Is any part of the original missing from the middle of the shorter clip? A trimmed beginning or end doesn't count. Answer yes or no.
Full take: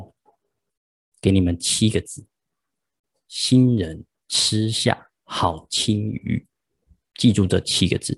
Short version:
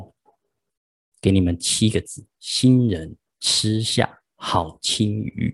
yes